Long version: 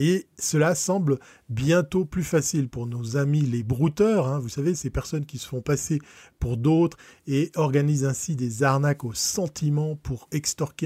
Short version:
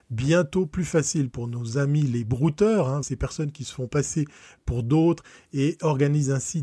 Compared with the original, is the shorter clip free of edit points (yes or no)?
no